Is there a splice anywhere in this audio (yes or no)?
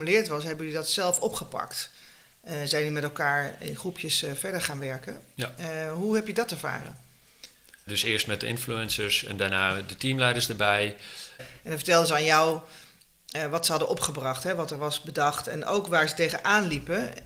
yes